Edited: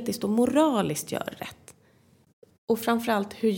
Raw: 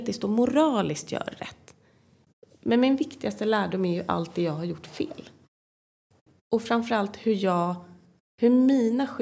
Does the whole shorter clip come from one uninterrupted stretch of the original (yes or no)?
no